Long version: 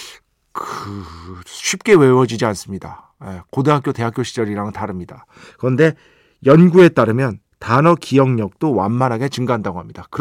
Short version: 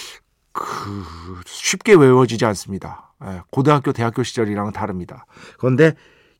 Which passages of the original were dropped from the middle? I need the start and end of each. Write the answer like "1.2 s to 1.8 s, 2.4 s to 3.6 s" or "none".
none

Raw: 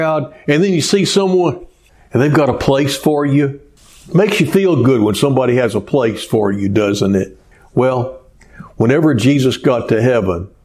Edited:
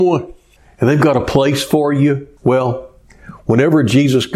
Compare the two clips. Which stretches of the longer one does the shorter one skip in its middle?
3.7 s to 7.7 s

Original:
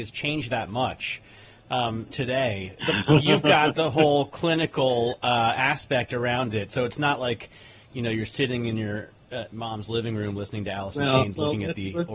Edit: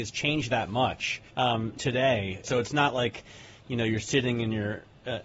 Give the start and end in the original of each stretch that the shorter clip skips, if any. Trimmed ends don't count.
1.3 s to 1.6 s, 2.8 s to 6.7 s

